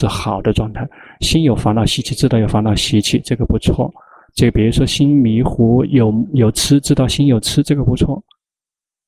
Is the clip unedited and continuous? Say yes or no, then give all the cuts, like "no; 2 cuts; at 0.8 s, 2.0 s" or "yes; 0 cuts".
yes; 0 cuts